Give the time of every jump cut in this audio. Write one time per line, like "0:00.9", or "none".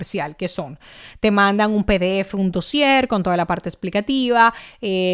none